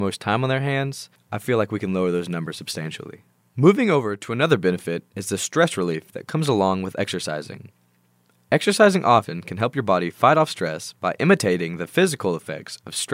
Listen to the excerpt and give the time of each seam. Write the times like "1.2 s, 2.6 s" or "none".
none

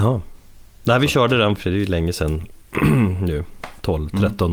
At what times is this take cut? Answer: 1.6 s

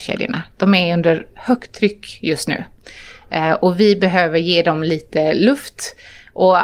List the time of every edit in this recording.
none

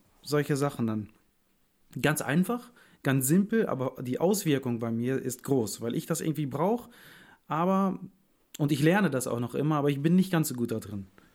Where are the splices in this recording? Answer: none

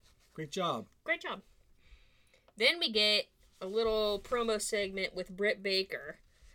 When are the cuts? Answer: none

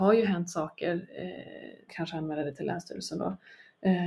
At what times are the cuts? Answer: 1.9 s

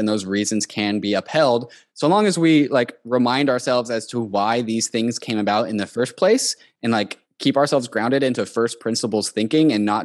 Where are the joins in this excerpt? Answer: none

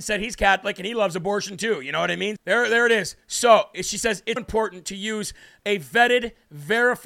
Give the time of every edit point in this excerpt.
2.4 s, 4.4 s

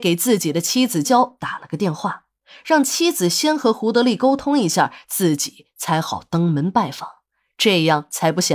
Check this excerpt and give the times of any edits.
1.0 s

